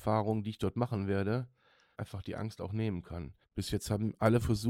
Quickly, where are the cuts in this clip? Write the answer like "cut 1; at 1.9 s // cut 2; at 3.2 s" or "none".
cut 1; at 1.9 s // cut 2; at 3.4 s